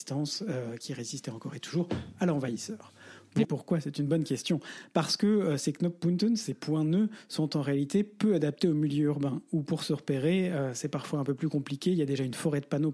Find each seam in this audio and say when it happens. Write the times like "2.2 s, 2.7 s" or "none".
3.4 s